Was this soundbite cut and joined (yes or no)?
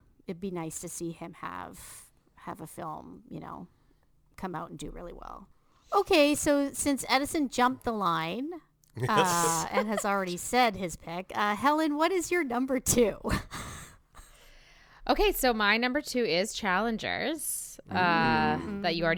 no